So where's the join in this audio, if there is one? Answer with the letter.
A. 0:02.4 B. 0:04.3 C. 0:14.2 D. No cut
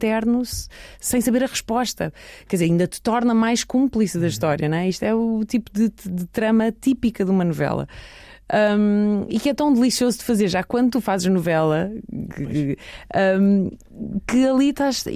D